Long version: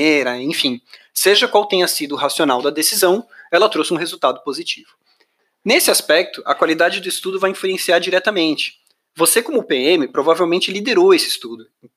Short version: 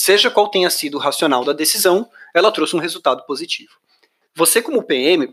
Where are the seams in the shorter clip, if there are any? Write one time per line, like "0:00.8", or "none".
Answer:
0:04.3